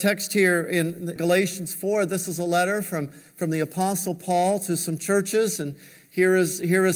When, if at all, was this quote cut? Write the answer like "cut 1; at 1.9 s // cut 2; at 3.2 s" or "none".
cut 1; at 1.2 s